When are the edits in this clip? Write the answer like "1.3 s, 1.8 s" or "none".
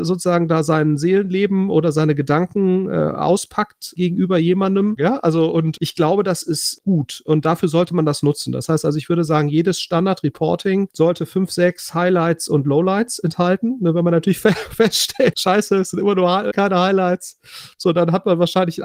5.0 s, 15.3 s, 16.5 s